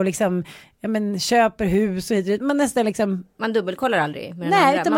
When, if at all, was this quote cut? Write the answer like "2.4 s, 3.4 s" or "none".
2.4 s